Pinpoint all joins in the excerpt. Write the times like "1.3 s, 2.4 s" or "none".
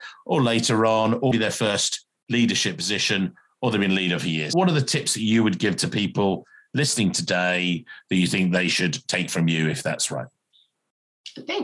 1.3 s